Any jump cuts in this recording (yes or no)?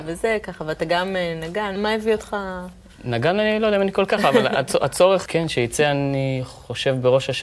yes